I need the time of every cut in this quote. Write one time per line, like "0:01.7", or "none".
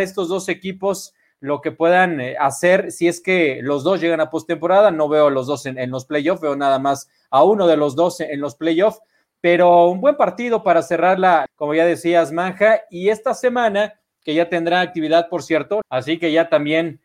0:11.5
0:15.8